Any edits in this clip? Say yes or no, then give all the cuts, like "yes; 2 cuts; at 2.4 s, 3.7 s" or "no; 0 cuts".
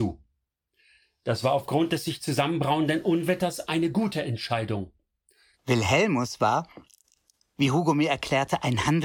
yes; 1 cut; at 5.5 s